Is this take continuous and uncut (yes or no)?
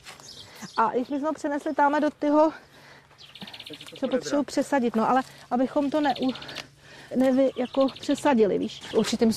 no